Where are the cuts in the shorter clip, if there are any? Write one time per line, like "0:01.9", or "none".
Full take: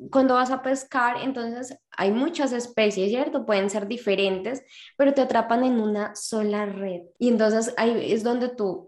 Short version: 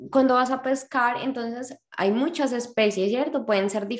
none